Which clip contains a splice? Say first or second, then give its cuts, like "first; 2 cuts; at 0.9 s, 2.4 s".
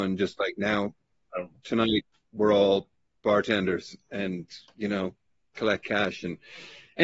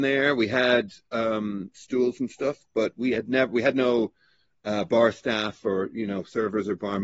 second; 1 cut; at 1.7 s